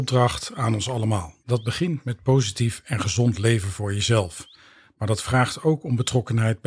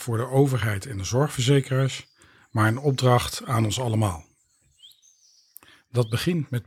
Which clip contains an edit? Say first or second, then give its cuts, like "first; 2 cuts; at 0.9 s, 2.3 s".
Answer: first; 1 cut; at 1.4 s